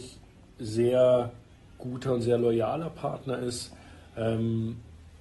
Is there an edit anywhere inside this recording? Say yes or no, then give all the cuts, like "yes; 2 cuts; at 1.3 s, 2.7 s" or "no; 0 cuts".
no; 0 cuts